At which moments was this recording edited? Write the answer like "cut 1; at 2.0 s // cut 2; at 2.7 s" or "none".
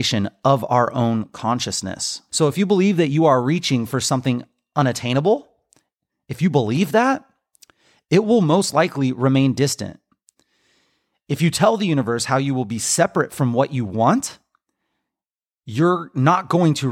cut 1; at 2.3 s

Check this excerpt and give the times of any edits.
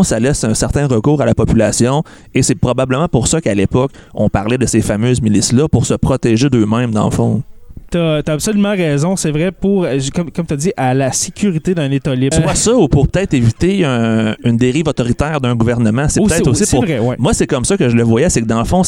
cut 1; at 12.3 s

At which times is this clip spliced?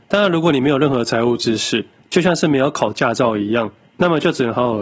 none

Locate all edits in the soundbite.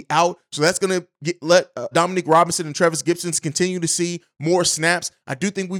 cut 1; at 1.9 s

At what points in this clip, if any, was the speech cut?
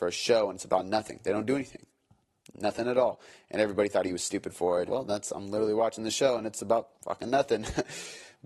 cut 1; at 4.9 s // cut 2; at 6.9 s

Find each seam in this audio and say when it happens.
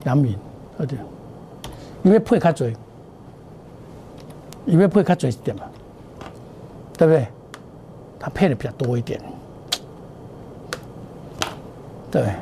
none

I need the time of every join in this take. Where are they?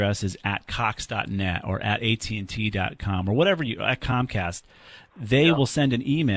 none

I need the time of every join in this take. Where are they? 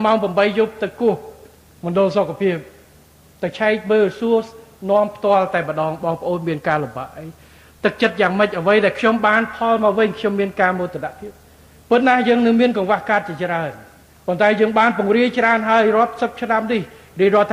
none

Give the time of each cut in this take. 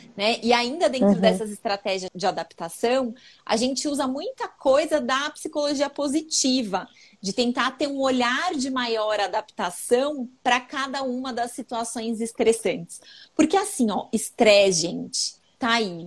cut 1; at 2.1 s

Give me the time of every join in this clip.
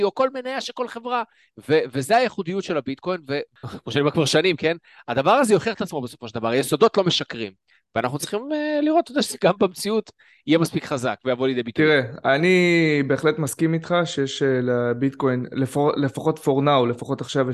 none

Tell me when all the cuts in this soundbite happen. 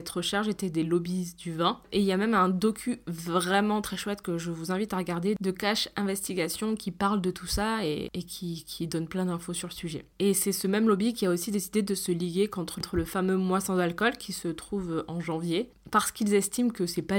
none

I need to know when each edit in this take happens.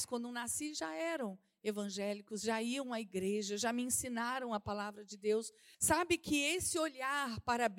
cut 1; at 5.7 s

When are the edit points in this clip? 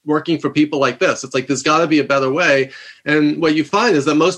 none

